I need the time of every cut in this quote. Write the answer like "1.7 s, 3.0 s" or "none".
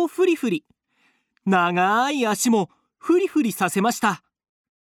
none